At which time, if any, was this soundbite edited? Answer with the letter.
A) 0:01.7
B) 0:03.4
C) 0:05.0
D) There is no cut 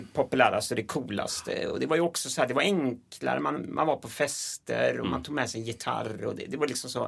D